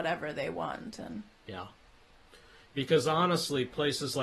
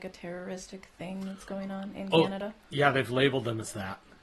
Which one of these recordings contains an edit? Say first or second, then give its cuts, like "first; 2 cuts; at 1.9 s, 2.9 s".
first; 1 cut; at 2.7 s